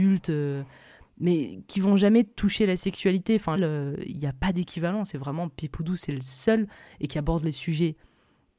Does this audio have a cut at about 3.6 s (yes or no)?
yes